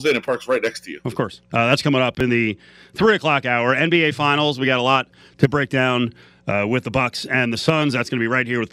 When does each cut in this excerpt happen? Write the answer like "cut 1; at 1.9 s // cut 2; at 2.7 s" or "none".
cut 1; at 1.5 s